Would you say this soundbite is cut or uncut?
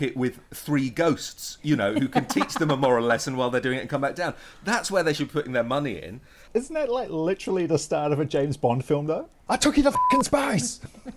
cut